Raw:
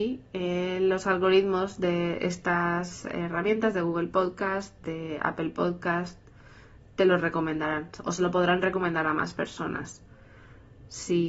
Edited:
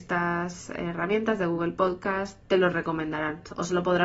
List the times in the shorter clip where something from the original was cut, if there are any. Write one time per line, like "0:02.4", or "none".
0:02.4